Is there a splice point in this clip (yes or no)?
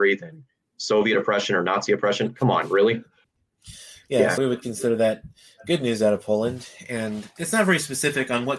yes